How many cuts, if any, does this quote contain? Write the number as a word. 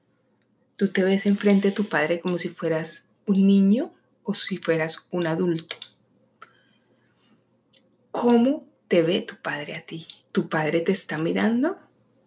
one